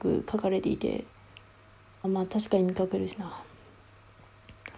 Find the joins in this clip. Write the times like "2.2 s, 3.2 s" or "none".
2.0 s

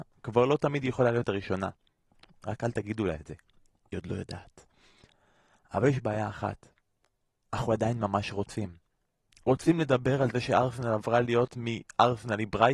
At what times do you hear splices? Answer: none

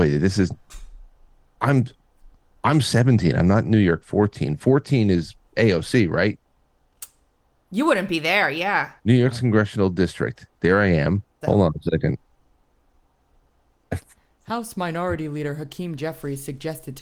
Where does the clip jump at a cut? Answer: 9.0 s, 11.4 s

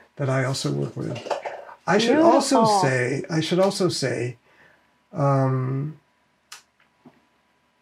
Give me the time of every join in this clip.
none

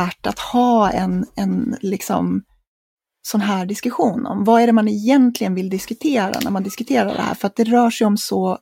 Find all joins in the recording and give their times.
none

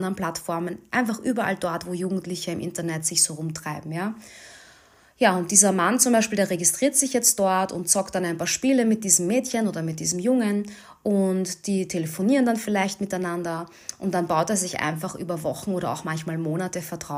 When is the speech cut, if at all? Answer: none

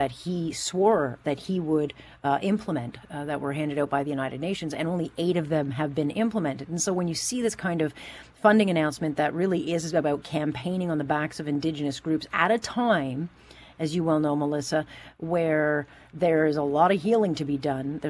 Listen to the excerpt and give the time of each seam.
none

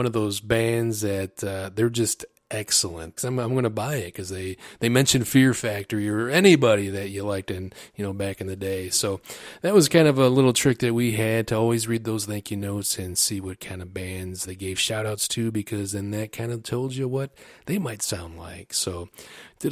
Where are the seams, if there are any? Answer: 3.2 s, 14.4 s

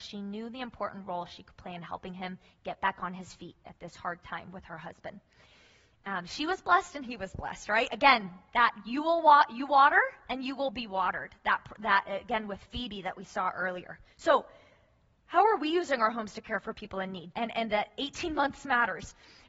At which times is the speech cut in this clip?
14.1 s, 17.3 s

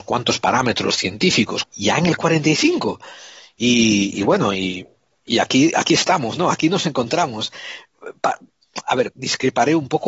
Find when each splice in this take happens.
1.6 s, 9.1 s

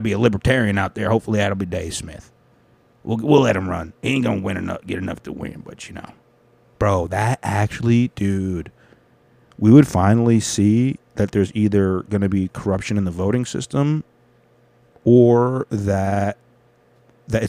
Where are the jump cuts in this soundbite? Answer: none

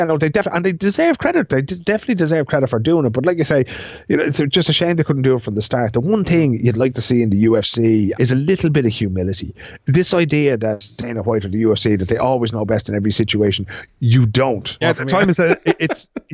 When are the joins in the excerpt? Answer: 8.1 s, 14.8 s

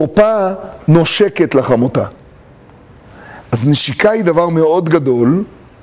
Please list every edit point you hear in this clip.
none

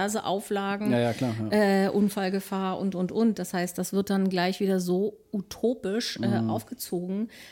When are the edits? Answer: none

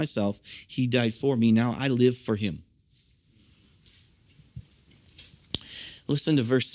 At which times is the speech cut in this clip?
none

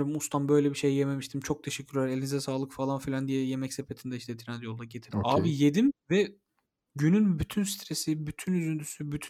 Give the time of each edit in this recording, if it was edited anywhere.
5.1 s

